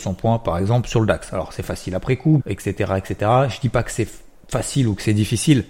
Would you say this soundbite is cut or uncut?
cut